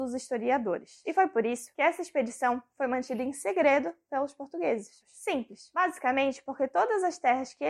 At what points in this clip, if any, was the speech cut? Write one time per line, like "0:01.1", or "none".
0:01.0
0:05.0